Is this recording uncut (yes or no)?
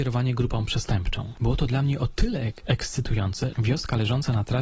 no